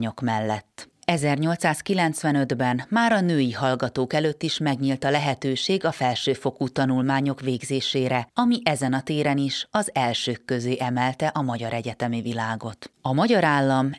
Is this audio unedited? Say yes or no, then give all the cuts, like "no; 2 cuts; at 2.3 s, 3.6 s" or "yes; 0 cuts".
no; 1 cut; at 0.9 s